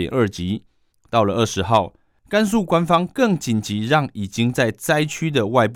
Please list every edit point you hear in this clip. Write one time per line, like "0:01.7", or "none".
0:00.9